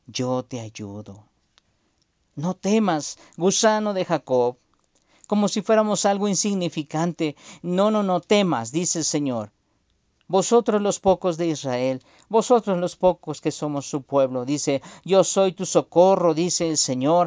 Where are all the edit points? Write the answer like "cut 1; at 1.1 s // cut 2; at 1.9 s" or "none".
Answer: none

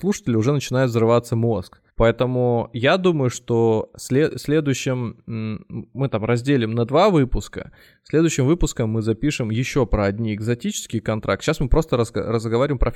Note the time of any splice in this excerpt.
cut 1; at 1.9 s

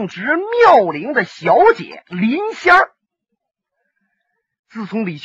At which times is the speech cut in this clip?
none

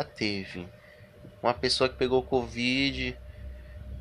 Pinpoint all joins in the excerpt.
cut 1; at 1.3 s

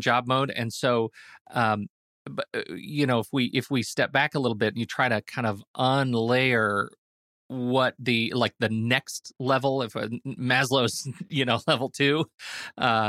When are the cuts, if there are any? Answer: none

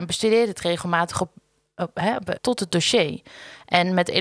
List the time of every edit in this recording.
cut 1; at 2.4 s

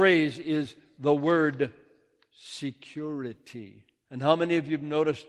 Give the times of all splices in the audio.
cut 1; at 4.0 s

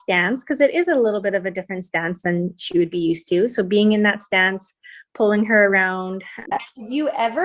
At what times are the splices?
cut 1; at 6.5 s

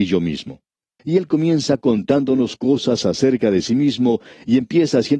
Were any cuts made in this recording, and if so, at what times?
cut 1; at 1.0 s

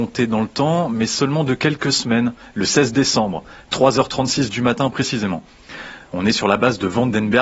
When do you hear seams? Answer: none

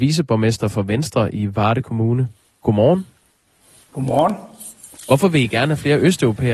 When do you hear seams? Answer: none

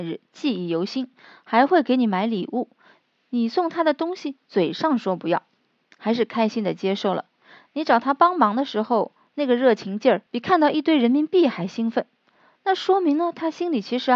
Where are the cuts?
cut 1; at 10.3 s

